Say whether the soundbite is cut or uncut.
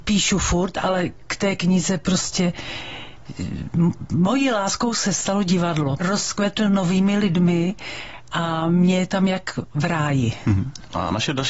cut